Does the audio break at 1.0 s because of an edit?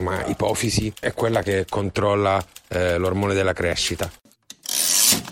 yes; 1 cut; at 1.0 s

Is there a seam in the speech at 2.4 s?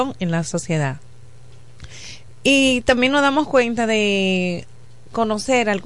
no; 0 cuts

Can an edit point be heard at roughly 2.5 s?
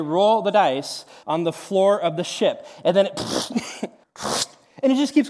no; 2 cuts; at 1.2 s, 4.0 s

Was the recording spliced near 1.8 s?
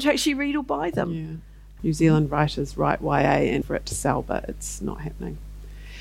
yes; 2 cuts; at 1.8 s, 3.6 s

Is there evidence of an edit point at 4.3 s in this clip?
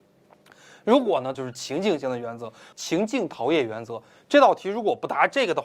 no; 2 cuts; at 1.3 s, 2.7 s

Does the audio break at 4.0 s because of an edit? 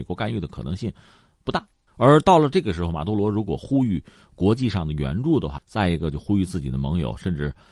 no; 2 cuts; at 1.9 s, 5.6 s

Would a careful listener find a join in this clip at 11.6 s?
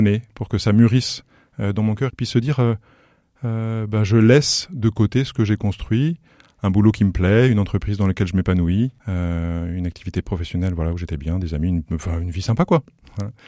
no; 2 cuts; at 2.1 s, 9.0 s

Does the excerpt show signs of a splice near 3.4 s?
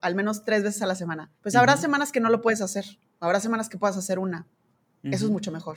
no; 1 cut; at 1.4 s

